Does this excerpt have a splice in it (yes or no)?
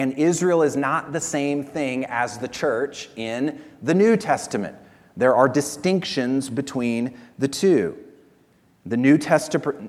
no